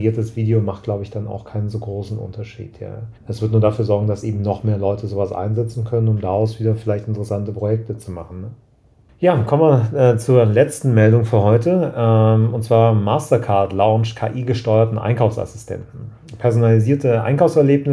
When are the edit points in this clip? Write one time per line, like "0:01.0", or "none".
0:03.2